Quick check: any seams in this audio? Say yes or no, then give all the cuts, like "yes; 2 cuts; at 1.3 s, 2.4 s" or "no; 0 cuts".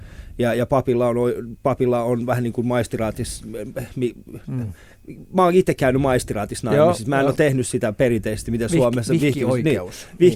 no; 0 cuts